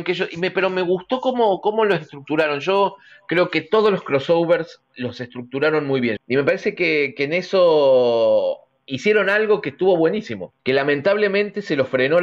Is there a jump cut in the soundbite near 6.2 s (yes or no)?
yes